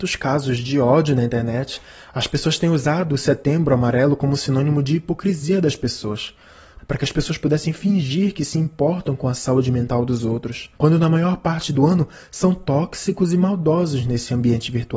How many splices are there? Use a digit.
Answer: 2